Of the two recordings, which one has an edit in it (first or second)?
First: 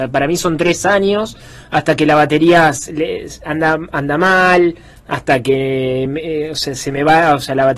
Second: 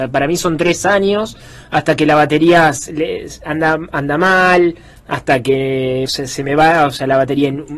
second